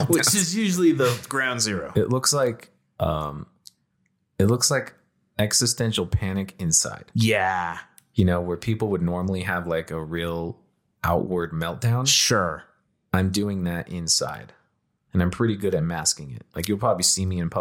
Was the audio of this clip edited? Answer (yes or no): yes